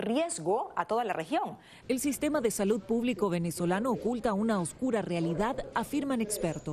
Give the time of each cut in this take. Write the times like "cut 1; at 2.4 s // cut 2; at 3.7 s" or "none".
cut 1; at 1.8 s